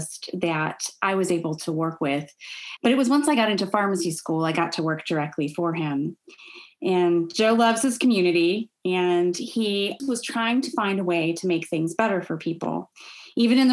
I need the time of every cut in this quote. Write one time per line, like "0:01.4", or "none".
0:02.8
0:10.0